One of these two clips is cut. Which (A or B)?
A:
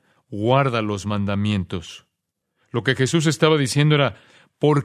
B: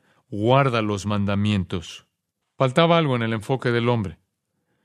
B